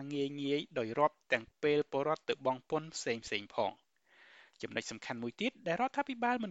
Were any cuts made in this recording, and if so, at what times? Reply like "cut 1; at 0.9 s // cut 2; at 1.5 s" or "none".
cut 1; at 1.3 s